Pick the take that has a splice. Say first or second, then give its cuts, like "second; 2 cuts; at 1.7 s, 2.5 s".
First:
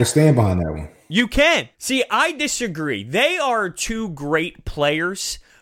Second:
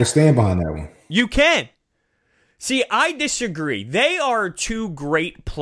first; 1 cut; at 1.7 s